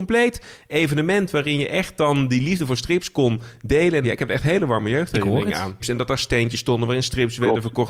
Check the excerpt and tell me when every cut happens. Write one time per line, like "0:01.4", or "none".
0:04.0
0:05.8